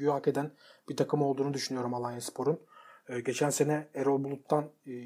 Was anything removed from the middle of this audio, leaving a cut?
no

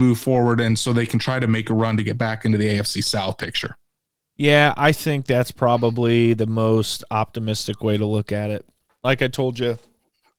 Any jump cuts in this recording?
no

